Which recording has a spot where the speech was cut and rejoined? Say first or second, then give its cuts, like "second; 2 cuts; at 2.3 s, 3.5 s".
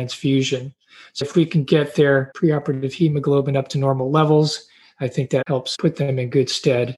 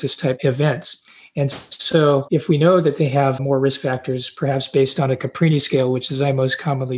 first; 1 cut; at 1.2 s